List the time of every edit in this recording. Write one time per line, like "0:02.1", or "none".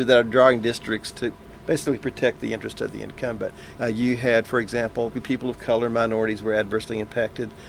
0:03.8
0:05.1